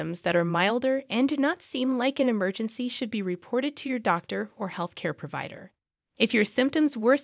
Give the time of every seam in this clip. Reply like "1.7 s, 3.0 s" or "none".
none

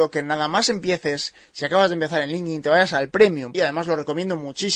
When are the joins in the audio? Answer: 3.5 s

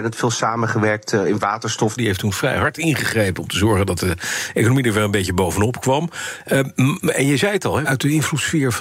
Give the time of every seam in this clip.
2.0 s, 7.8 s

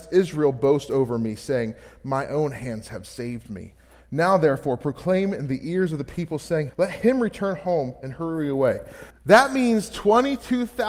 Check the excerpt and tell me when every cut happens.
6.7 s, 9.1 s

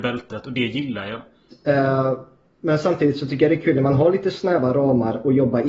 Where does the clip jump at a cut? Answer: 1.5 s

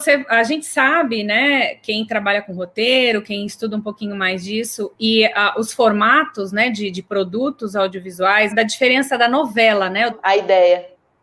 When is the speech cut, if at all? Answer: 8.5 s, 10.1 s

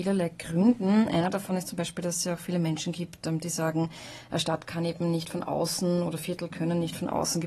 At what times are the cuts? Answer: none

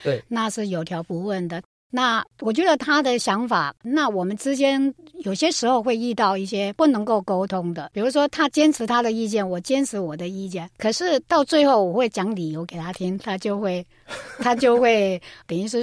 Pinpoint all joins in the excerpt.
3.8 s, 13.2 s

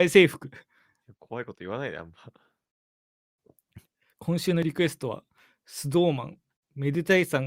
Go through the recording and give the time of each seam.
none

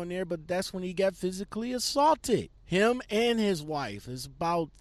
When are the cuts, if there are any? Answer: 2.6 s

